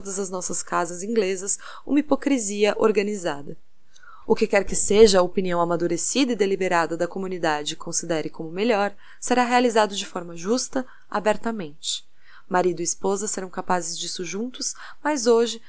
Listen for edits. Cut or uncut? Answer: uncut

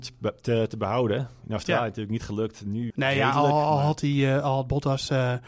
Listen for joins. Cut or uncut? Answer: cut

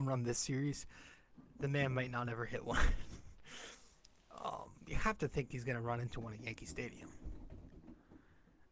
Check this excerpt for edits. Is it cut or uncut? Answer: uncut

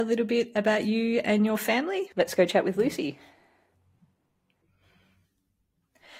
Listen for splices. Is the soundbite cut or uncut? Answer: cut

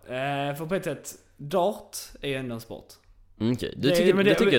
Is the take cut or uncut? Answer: uncut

